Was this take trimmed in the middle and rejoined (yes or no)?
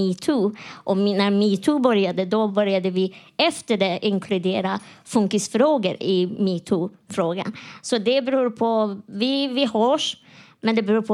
no